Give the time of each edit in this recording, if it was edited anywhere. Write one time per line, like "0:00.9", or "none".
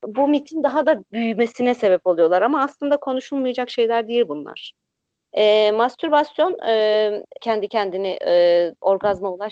0:05.1
0:07.4